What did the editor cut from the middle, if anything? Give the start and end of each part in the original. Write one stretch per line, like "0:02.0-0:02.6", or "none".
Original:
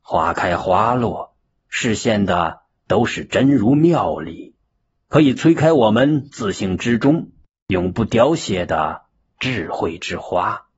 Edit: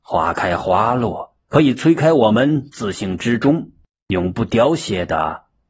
0:01.4-0:05.0